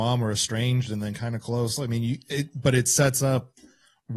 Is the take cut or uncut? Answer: uncut